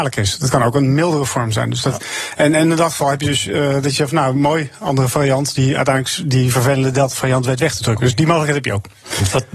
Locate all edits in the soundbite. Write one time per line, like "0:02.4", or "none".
none